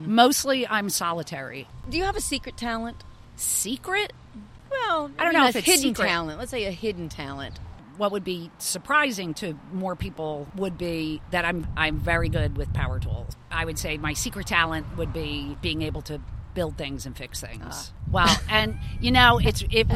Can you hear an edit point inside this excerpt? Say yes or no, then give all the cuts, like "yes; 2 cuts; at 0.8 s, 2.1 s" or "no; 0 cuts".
yes; 1 cut; at 18.1 s